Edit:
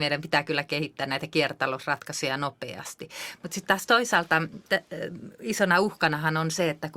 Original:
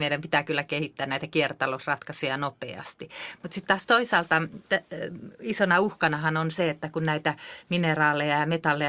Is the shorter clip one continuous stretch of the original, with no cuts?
yes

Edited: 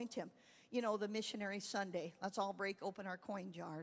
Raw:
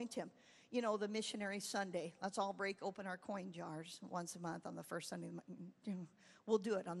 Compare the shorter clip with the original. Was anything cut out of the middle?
no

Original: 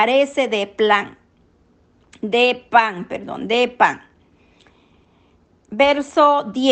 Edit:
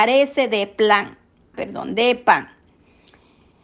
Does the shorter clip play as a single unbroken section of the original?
no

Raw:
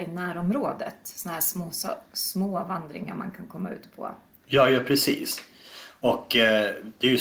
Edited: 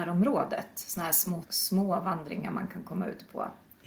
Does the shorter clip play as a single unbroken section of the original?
no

